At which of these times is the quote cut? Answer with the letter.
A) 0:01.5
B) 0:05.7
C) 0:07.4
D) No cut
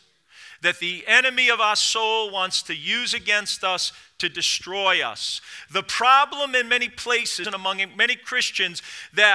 C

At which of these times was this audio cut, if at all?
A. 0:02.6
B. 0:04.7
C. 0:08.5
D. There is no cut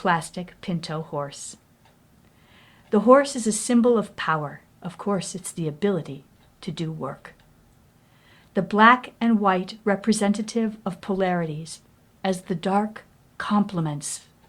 B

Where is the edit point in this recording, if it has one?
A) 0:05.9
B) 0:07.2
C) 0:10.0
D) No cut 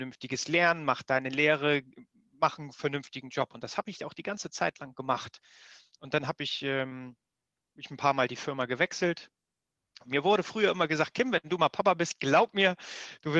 C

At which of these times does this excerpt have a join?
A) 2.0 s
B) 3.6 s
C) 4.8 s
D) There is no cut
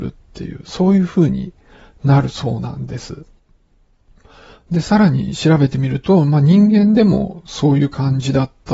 D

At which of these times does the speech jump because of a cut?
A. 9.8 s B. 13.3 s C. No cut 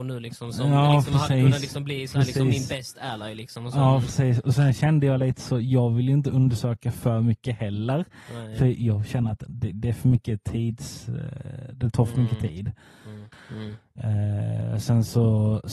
B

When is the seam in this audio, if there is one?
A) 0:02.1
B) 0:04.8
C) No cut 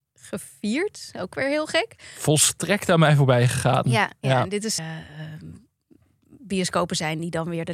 B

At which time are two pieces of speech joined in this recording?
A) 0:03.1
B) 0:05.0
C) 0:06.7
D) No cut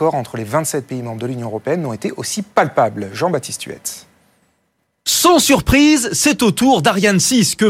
D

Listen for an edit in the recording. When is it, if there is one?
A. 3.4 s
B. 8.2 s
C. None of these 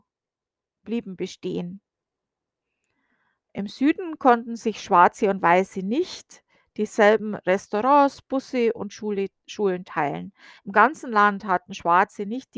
C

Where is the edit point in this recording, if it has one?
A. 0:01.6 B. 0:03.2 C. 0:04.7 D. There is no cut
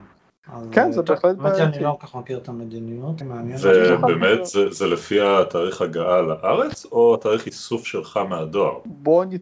B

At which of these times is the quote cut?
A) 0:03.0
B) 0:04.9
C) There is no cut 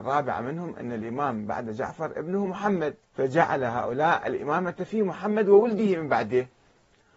A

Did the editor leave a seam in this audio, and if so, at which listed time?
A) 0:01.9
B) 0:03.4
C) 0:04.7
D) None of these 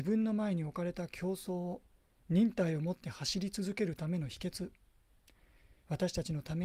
D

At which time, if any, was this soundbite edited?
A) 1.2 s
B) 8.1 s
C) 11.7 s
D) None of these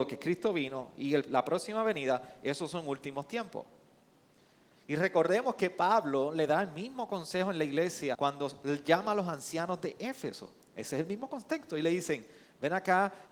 B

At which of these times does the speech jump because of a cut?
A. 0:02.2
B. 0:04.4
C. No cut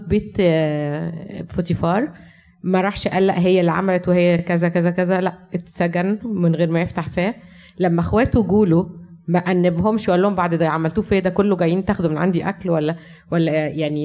C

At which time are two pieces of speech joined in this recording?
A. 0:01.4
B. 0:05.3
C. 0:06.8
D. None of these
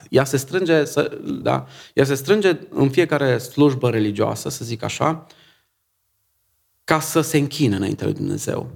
A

